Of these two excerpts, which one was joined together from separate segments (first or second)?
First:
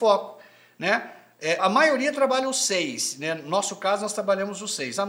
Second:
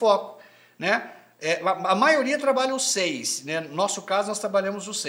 first